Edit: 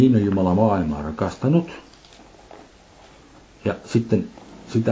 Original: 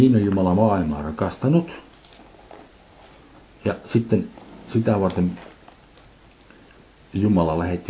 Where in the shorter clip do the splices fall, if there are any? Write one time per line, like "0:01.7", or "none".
none